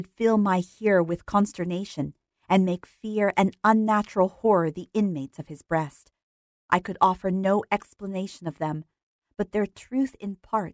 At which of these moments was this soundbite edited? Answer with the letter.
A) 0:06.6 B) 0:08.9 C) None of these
A